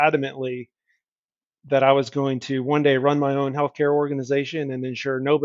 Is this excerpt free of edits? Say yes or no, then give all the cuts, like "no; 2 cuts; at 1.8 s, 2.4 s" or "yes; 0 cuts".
yes; 0 cuts